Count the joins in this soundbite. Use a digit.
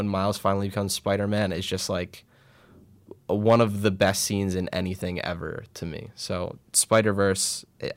0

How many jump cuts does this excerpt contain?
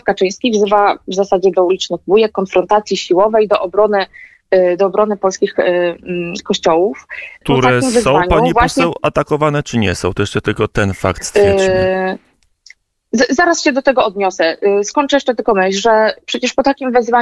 1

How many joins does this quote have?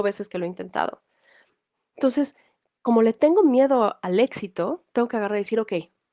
0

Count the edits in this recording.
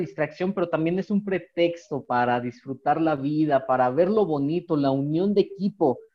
0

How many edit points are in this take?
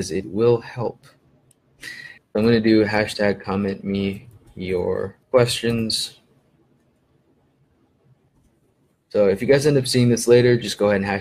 2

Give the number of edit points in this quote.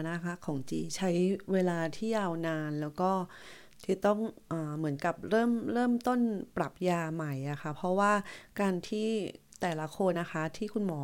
1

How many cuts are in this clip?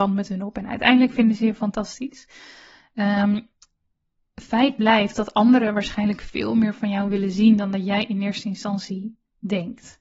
0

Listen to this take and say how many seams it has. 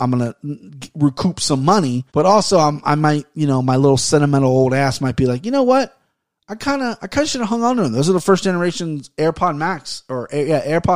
1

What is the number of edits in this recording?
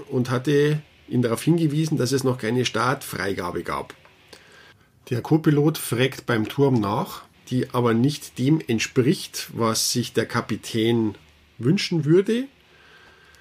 1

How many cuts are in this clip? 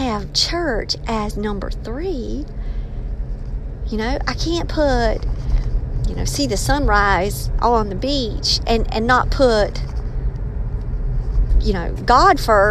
0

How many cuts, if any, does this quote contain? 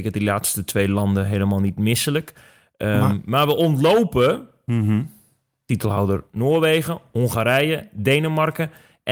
0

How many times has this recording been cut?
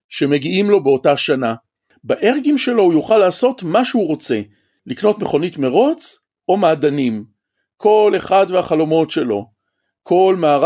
0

